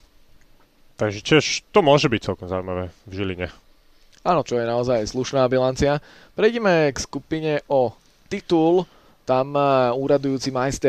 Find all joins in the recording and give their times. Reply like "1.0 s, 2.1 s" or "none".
4.4 s